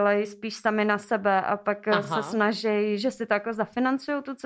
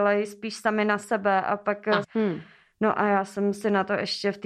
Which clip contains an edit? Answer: second; 1 cut; at 2.0 s

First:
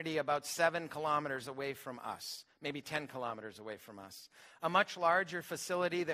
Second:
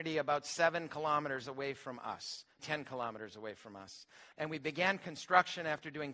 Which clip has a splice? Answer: second; 2 cuts; at 2.6 s, 4.3 s

